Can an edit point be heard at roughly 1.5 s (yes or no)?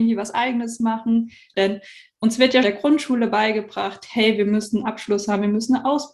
yes